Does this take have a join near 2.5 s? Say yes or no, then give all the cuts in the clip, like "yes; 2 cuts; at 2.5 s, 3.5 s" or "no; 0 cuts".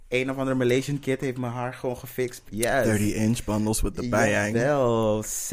yes; 1 cut; at 2.5 s